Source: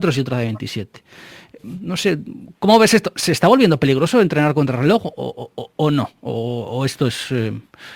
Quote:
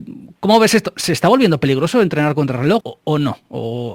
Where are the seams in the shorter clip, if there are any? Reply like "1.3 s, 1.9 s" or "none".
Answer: 2.8 s

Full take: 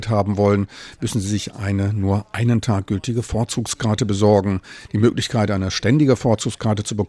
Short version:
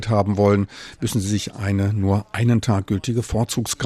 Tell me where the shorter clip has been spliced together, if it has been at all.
none

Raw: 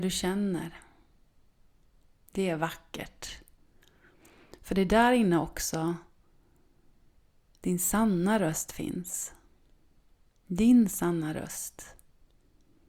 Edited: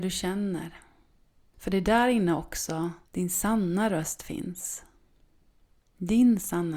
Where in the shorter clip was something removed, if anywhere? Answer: 1.5 s, 3.1 s

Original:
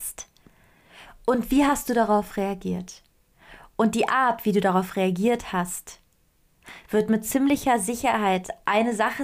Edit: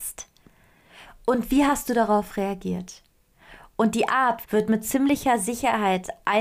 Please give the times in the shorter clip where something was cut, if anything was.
4.4 s

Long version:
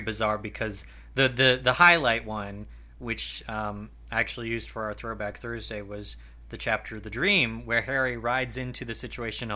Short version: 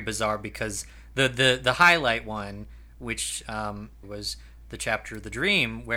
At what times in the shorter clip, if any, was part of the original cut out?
4.0 s

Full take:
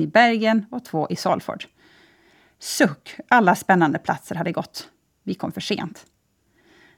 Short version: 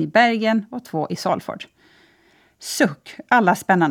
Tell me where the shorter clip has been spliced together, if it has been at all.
none

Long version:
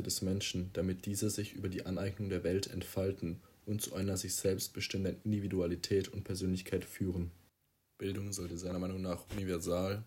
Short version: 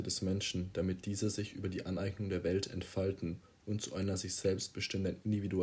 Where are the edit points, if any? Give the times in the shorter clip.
none

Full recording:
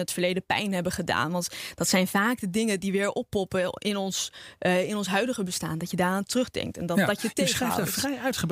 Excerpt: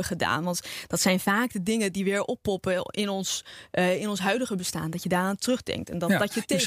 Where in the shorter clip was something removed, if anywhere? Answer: none

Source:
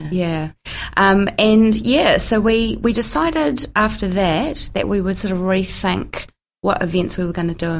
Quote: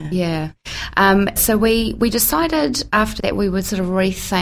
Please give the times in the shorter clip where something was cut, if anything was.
1.4 s, 3.2 s

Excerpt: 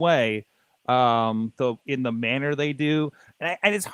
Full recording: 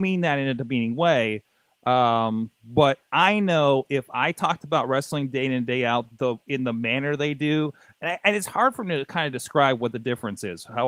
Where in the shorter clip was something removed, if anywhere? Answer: 1.6 s

